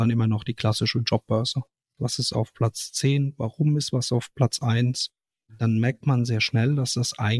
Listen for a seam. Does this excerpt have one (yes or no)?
yes